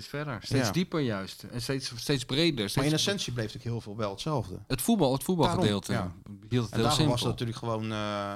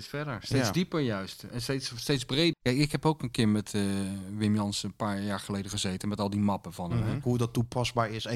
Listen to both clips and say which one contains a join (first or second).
second